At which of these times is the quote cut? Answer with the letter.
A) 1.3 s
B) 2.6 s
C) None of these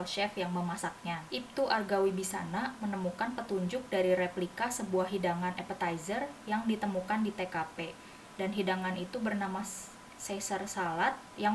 A